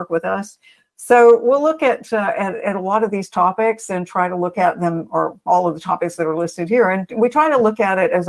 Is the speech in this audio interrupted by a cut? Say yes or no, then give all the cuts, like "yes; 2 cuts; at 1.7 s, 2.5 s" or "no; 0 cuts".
no; 0 cuts